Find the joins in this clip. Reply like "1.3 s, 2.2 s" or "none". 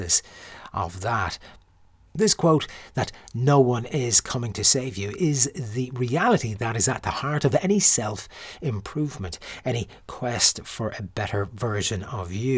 none